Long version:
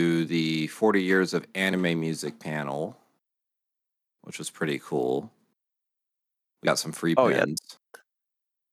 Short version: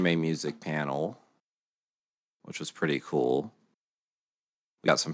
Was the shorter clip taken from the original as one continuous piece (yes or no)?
yes